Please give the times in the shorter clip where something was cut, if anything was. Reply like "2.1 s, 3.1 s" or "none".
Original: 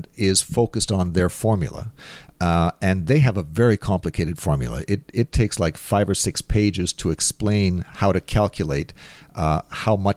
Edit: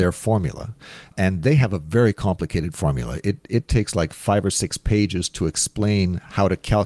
1.1 s